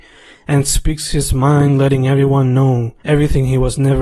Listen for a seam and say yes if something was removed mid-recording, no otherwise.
yes